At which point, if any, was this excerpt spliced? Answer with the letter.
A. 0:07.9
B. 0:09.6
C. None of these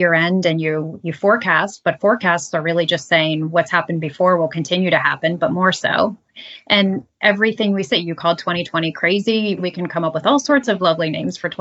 B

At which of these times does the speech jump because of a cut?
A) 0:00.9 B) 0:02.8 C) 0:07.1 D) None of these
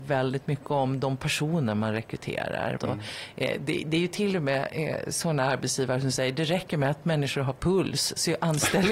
B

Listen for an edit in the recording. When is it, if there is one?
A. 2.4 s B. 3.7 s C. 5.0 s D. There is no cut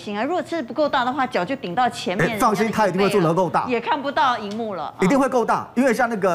D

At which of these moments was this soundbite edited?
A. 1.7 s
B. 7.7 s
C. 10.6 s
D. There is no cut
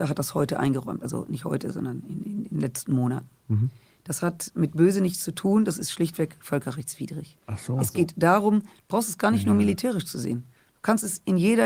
D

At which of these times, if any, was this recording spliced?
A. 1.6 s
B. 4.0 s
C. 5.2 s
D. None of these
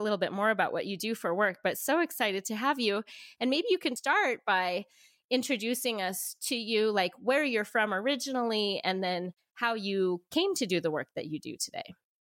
B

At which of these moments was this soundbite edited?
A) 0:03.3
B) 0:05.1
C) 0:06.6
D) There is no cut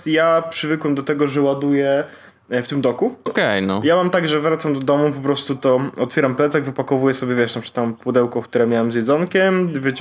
A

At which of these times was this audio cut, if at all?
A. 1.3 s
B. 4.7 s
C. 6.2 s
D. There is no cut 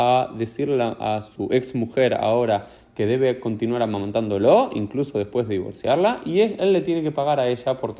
D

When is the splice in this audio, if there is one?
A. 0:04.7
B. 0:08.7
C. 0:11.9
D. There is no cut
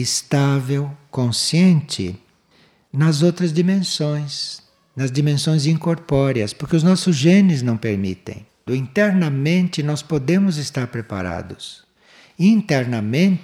B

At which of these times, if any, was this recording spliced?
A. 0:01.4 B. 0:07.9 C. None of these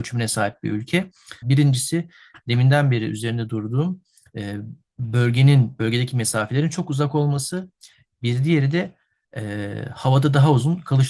A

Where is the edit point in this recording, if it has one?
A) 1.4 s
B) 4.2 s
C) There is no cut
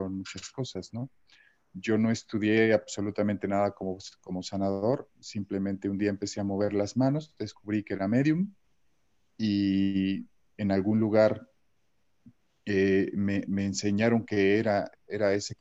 C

